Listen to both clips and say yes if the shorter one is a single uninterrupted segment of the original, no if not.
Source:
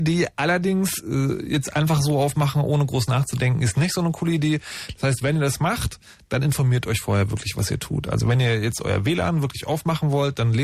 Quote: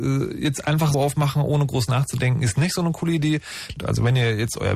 no